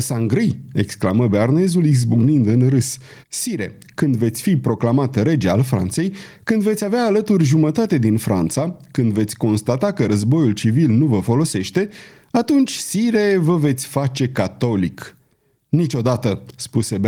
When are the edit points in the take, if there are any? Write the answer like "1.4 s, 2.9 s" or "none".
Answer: 3.2 s